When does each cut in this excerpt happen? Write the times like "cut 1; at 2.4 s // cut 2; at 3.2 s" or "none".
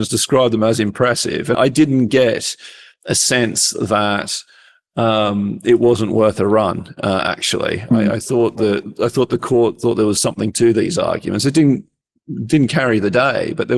cut 1; at 1.5 s